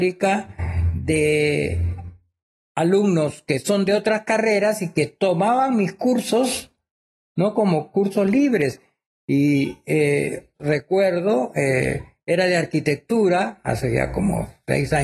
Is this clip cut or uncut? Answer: cut